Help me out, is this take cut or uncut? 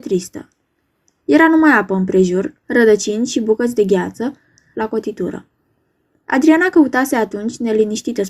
cut